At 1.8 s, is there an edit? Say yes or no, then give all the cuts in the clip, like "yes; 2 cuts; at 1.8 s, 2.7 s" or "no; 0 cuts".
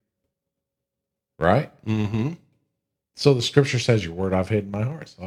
no; 0 cuts